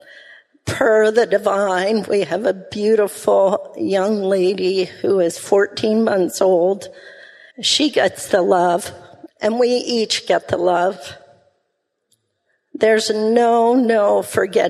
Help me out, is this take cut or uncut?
cut